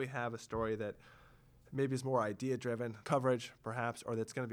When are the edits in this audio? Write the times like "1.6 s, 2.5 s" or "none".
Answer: 3.0 s